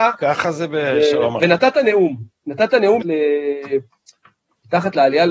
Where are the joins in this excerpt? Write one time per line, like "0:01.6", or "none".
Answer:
0:01.4
0:03.0